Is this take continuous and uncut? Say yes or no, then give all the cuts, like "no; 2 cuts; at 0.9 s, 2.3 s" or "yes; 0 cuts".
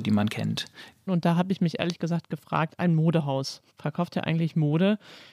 no; 2 cuts; at 1.1 s, 3.7 s